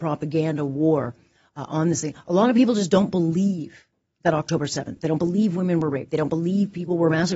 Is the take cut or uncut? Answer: uncut